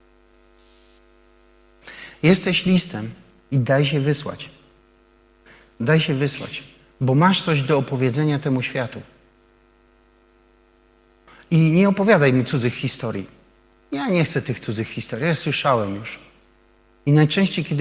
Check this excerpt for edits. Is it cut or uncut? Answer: uncut